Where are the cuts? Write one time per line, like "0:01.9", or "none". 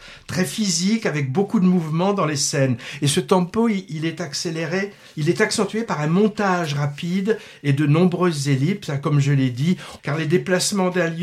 0:10.0